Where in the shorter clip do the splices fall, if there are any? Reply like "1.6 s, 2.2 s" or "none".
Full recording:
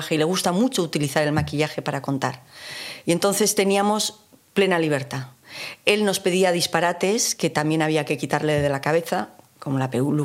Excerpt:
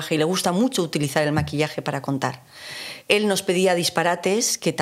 3.0 s